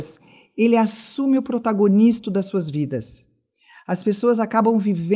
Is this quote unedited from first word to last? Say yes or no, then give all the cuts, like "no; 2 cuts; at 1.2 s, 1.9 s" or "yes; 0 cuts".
yes; 0 cuts